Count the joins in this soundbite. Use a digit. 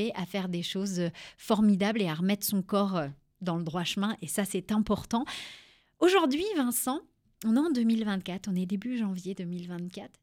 0